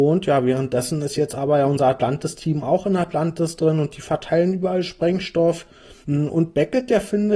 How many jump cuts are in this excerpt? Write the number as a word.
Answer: one